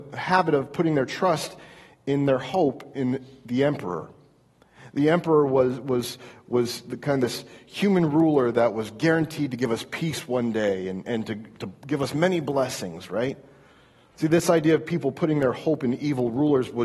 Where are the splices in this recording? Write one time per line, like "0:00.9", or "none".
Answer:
0:11.0
0:14.2